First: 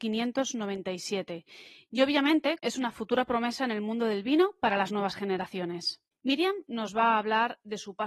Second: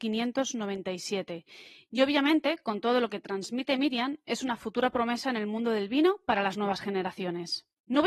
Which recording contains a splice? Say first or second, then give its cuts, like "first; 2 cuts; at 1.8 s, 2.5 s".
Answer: first; 2 cuts; at 2.6 s, 6.1 s